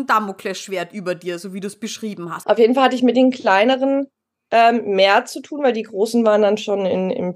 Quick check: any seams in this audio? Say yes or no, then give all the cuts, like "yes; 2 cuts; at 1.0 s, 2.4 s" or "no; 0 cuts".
yes; 1 cut; at 2.4 s